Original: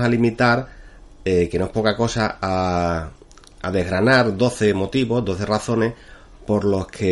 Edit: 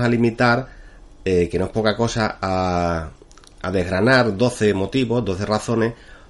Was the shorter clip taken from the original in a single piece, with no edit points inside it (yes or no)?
yes